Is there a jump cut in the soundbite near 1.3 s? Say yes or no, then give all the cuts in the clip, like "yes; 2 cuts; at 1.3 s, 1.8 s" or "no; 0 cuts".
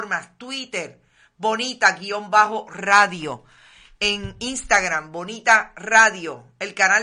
no; 0 cuts